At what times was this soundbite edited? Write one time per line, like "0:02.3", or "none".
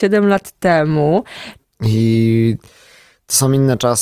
0:01.6